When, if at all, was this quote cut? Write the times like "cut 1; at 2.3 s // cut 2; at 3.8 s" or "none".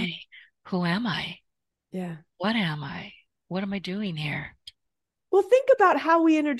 none